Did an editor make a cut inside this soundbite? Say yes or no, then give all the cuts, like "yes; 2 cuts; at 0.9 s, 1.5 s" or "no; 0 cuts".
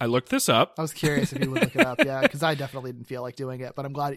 no; 0 cuts